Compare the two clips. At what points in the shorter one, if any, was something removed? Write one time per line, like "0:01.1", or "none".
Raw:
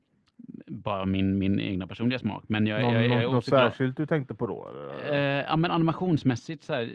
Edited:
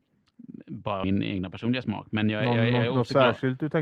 0:01.0